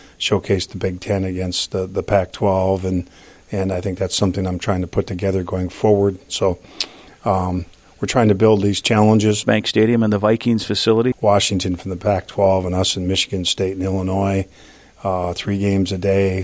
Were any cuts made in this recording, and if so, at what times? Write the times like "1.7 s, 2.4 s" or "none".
6.3 s, 9.4 s, 11.1 s

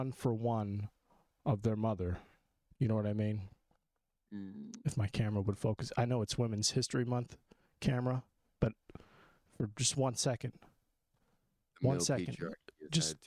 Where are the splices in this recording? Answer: none

